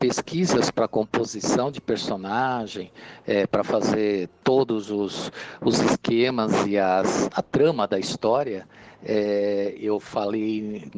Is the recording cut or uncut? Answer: cut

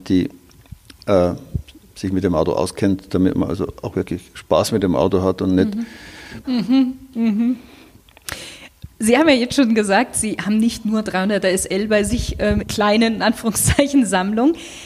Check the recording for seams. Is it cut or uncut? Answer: cut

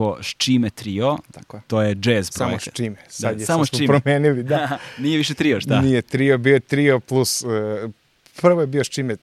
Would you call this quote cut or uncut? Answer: uncut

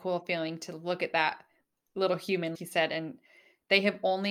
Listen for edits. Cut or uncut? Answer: cut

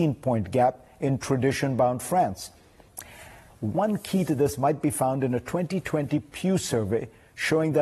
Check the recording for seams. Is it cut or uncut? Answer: cut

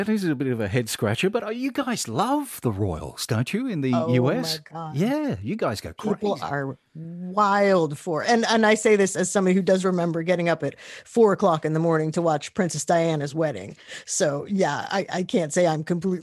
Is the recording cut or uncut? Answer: uncut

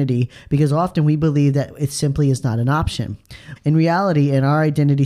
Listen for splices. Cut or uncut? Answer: cut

